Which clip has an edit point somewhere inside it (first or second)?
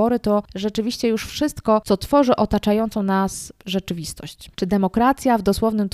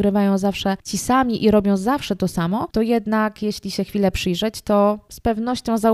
first